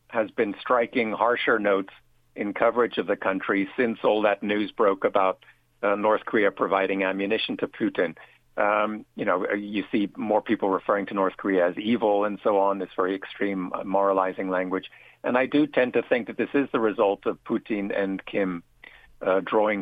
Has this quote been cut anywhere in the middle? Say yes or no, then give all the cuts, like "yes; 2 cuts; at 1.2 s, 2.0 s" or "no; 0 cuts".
no; 0 cuts